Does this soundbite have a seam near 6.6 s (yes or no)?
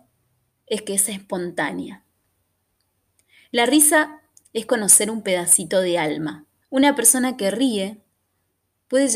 yes